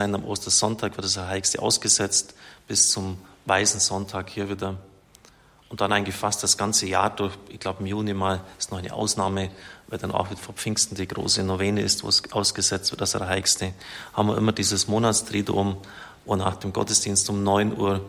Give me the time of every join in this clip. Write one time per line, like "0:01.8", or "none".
0:10.4